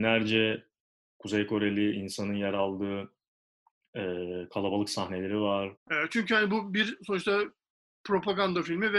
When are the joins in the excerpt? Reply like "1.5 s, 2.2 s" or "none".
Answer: 5.8 s